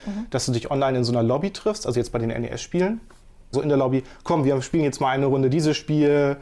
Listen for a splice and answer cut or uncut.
cut